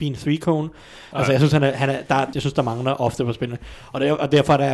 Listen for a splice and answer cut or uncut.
cut